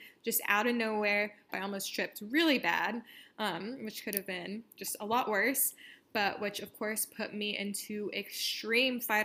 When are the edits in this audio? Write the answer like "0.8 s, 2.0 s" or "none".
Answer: 1.5 s